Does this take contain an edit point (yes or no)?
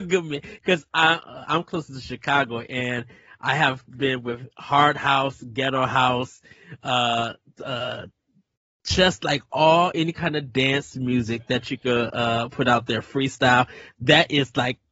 no